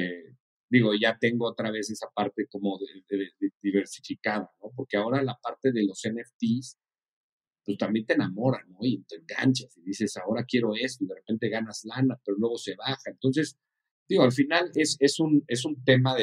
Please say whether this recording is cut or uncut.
uncut